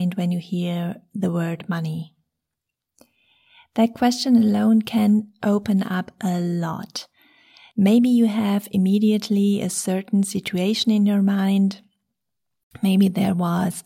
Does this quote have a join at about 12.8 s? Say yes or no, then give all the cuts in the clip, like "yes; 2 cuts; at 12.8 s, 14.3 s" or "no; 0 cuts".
no; 1 cut; at 7.7 s